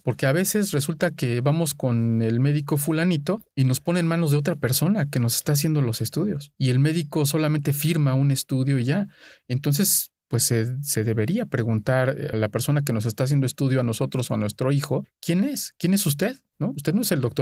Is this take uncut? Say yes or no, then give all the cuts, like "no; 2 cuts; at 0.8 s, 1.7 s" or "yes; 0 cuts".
no; 1 cut; at 12.3 s